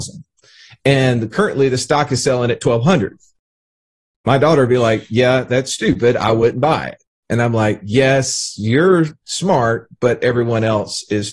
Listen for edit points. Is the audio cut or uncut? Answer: uncut